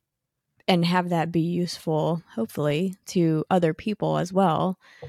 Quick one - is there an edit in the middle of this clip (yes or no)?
no